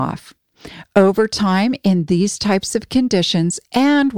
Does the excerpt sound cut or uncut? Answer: uncut